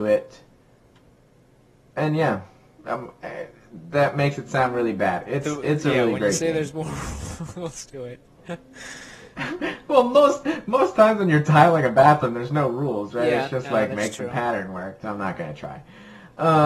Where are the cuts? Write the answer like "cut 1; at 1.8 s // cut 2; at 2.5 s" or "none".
cut 1; at 15.0 s

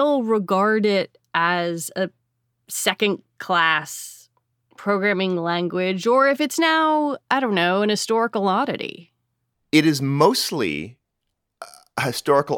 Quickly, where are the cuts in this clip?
none

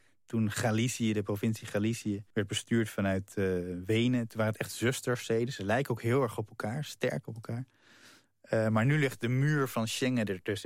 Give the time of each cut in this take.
cut 1; at 2.3 s

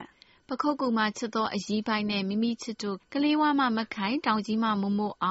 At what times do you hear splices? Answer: cut 1; at 3.0 s

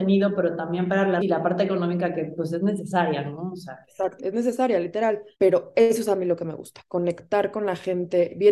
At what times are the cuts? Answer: cut 1; at 1.2 s // cut 2; at 4.2 s // cut 3; at 5.3 s

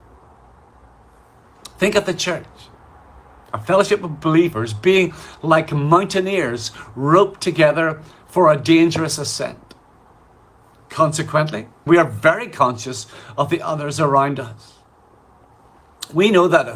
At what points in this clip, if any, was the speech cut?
cut 1; at 11.9 s

